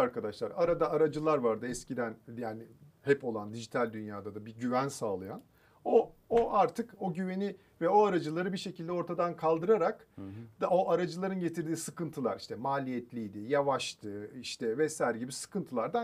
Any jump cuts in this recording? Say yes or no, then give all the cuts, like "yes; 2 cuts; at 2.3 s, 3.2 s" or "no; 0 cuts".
no; 0 cuts